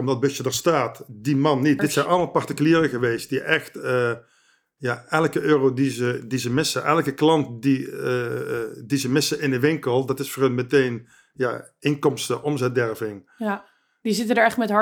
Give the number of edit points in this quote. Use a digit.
1